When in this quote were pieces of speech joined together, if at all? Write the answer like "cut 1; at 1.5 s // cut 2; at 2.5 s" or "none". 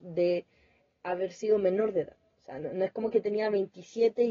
none